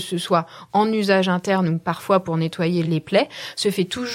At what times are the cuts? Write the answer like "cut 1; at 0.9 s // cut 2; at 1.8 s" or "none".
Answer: cut 1; at 2.8 s